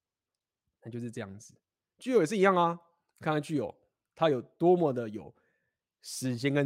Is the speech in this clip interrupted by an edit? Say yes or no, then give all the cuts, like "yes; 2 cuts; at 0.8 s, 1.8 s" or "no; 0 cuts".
no; 0 cuts